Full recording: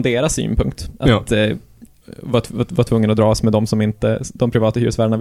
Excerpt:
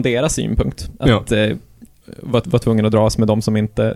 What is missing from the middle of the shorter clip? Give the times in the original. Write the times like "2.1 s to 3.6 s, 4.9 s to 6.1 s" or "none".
2.4 s to 2.7 s